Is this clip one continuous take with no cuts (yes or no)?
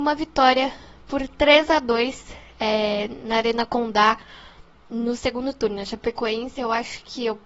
no